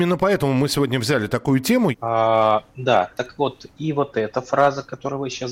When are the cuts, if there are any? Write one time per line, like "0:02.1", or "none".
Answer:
0:01.9